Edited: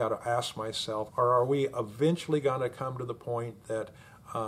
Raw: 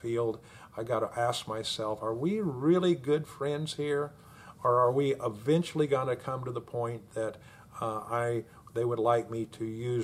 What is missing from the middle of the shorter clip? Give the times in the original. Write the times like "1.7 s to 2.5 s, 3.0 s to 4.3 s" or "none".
2.0 s to 4.5 s